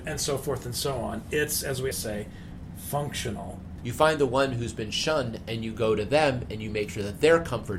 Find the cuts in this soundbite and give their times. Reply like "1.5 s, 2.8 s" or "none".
1.9 s, 3.8 s

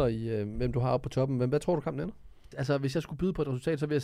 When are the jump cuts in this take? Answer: 2.5 s

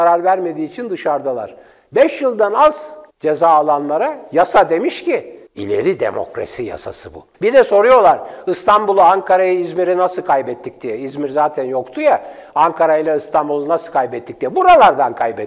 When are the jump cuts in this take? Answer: 3.1 s, 5.5 s, 7.3 s

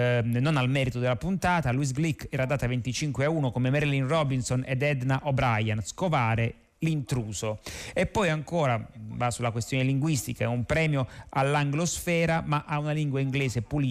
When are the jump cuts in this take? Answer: none

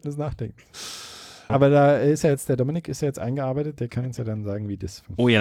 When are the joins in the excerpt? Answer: 1.5 s

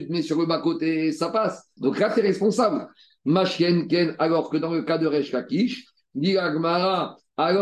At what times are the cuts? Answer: 1.8 s

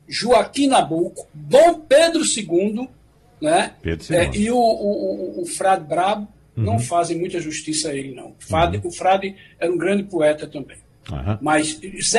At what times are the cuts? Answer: none

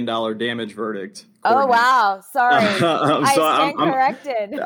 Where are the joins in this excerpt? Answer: none

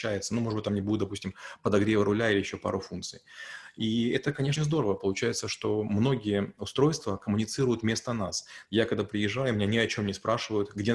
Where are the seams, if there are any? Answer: 4.6 s, 8.7 s

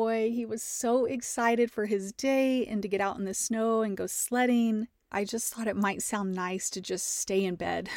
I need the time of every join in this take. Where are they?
5.1 s

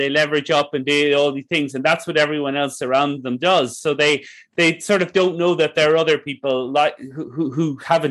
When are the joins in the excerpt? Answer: none

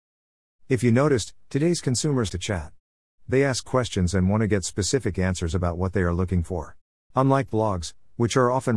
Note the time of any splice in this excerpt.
2.3 s, 7.1 s

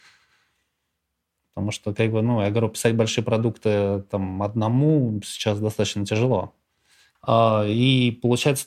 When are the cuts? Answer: 1.4 s, 7.2 s

